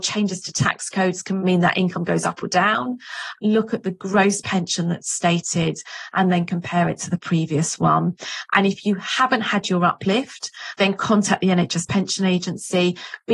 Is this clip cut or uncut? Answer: cut